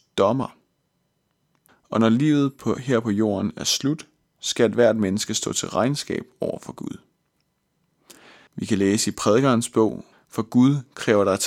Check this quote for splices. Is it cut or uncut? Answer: cut